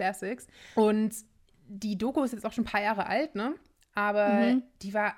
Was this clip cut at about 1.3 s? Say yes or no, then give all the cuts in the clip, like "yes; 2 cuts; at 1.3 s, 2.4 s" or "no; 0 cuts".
no; 0 cuts